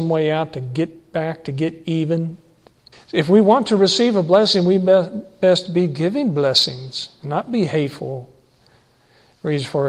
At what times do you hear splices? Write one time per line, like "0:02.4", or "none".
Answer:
0:02.9